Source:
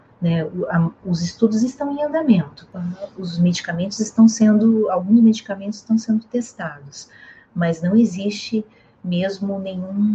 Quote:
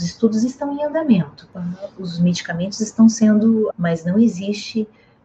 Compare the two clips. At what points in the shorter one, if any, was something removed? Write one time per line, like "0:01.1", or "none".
0:03.7

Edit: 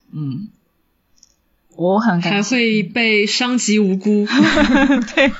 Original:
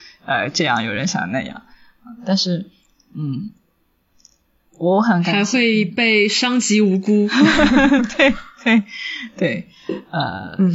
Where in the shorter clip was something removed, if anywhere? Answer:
none

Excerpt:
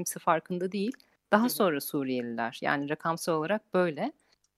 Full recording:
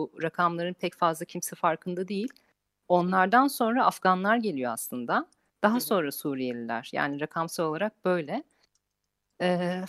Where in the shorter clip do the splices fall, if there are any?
0:01.2

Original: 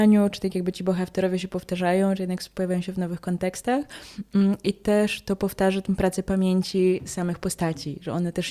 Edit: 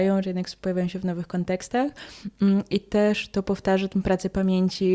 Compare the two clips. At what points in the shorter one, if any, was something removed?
none

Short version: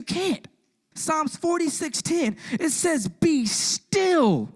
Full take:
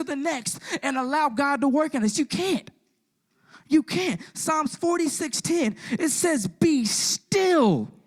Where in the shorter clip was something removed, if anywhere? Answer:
0:00.9

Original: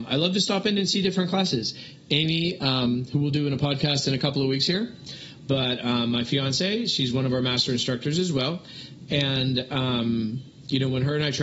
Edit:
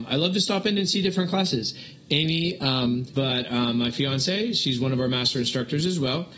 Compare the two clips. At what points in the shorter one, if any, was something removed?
0:03.1

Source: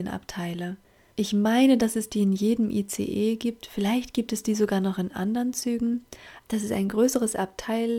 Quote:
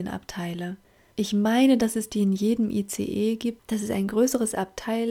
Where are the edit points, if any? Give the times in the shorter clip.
0:03.6

